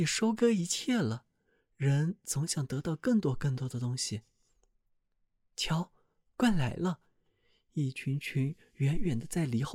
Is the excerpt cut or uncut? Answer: uncut